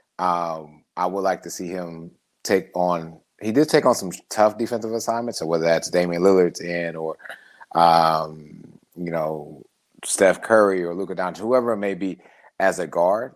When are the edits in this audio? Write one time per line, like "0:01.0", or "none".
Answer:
0:05.3